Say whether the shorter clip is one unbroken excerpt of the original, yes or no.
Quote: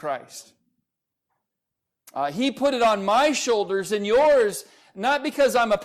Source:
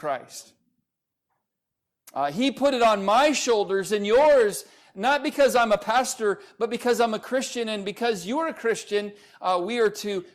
yes